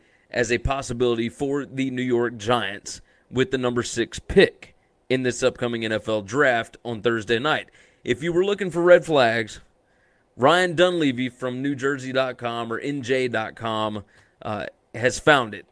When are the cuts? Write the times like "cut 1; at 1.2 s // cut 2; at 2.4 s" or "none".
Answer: none